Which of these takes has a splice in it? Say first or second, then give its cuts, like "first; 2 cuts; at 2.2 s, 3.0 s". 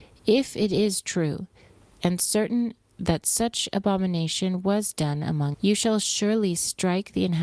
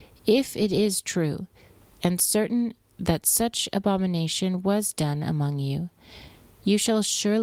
first; 1 cut; at 5.5 s